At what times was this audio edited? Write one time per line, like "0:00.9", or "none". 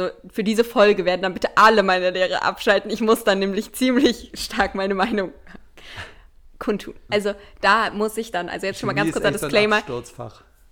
0:07.1